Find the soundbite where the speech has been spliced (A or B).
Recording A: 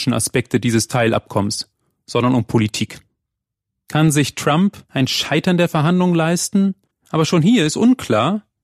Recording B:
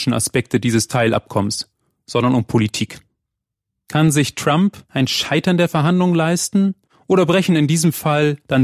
A